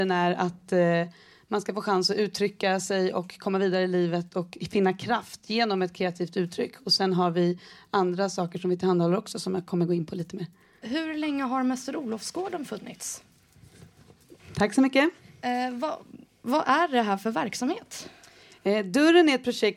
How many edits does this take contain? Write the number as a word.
two